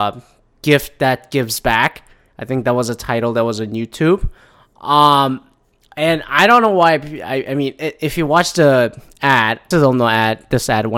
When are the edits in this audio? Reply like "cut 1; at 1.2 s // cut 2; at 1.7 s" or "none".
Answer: cut 1; at 9.7 s